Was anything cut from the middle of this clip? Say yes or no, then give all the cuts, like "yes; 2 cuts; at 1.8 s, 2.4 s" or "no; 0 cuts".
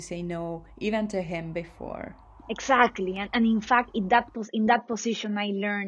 no; 0 cuts